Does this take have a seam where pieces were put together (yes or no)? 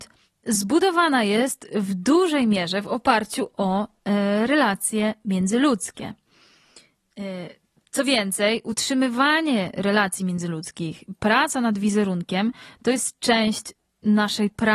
no